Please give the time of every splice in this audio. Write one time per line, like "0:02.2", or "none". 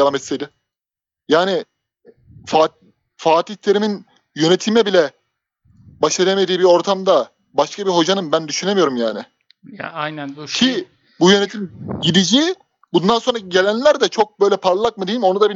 none